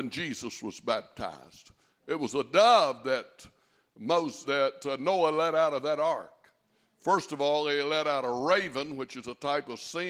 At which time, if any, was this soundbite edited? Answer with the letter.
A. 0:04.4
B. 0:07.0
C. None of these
A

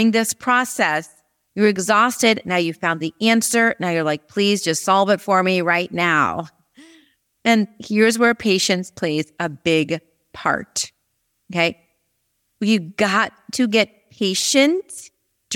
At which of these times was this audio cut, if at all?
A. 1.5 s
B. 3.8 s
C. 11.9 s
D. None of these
A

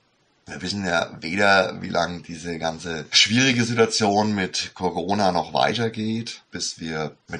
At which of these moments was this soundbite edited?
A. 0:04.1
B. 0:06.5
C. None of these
B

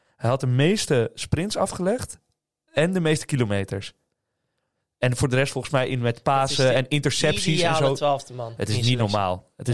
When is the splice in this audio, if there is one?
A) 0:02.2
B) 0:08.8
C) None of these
C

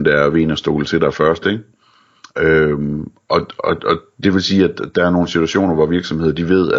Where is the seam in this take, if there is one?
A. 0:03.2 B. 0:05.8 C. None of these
C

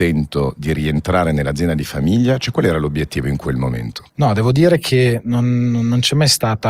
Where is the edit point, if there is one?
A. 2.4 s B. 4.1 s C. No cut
B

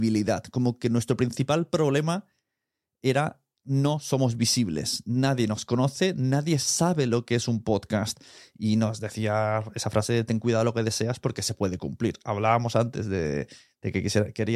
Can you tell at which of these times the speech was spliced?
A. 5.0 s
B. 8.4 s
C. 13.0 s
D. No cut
D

